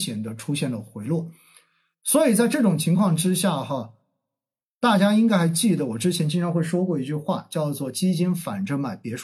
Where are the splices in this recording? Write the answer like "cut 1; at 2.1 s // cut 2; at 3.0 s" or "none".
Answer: none